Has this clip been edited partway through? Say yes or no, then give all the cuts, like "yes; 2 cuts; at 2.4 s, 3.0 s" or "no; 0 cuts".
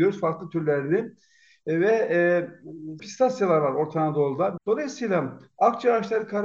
yes; 2 cuts; at 3.0 s, 4.6 s